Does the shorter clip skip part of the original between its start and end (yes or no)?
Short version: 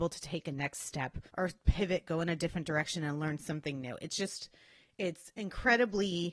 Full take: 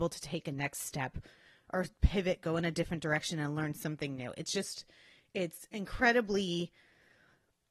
yes